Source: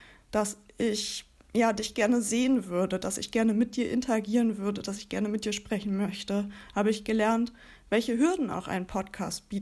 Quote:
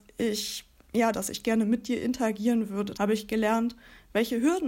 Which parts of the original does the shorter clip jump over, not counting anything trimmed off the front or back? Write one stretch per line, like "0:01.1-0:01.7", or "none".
0:01.7-0:03.0
0:04.8-0:06.7